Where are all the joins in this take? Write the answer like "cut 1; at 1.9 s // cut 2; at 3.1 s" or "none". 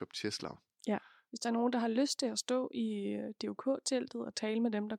cut 1; at 1.3 s

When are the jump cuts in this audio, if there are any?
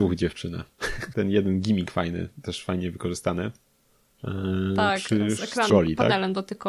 cut 1; at 1.1 s // cut 2; at 5.7 s

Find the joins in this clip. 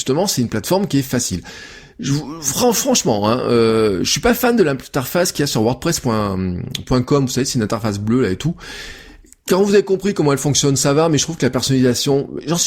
none

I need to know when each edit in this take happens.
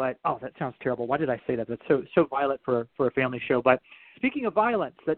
cut 1; at 4.1 s

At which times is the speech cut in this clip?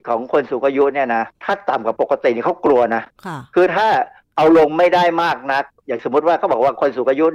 cut 1; at 1.3 s

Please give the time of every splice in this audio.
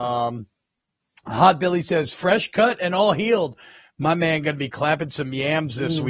none

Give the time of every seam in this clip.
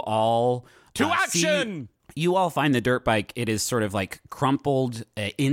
none

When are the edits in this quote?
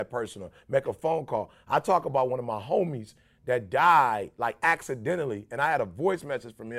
none

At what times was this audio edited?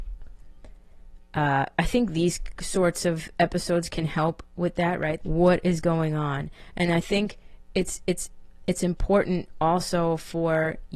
cut 1; at 5.2 s

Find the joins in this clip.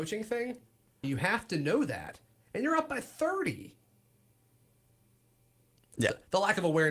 cut 1; at 1.0 s

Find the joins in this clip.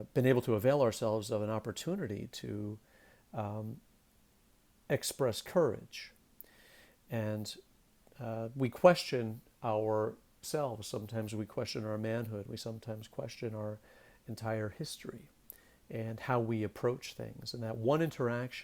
none

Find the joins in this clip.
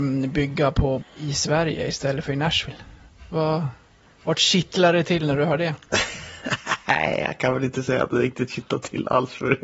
cut 1; at 1.0 s

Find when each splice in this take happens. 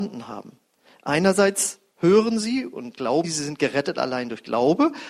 cut 1; at 3.2 s

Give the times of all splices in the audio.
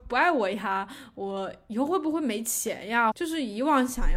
cut 1; at 3.1 s

